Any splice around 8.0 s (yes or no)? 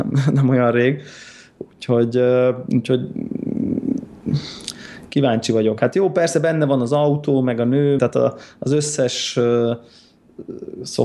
yes